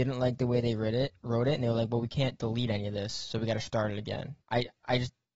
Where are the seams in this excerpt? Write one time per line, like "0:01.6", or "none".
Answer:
0:04.4

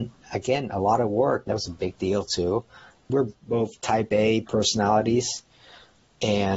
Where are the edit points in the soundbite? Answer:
0:01.5
0:03.1

